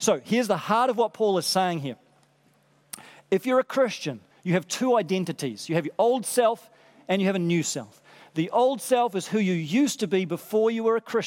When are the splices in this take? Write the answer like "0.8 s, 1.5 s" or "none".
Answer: 4.3 s